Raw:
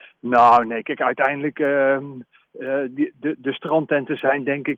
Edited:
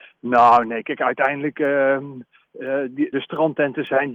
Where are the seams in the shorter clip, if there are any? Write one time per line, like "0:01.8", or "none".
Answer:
0:03.1

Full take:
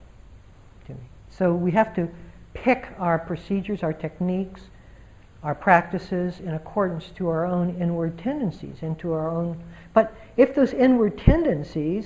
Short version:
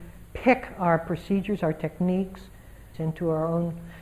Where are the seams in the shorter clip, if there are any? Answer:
0:02.9

